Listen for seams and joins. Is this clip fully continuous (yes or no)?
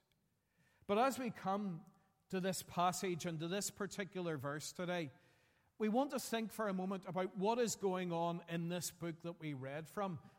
yes